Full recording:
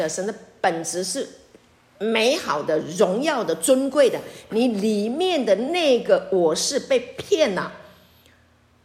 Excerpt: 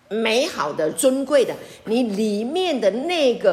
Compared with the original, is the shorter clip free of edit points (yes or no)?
no